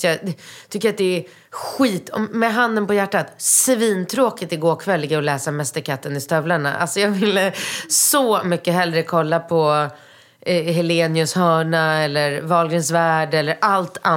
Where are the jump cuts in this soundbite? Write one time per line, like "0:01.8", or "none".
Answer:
none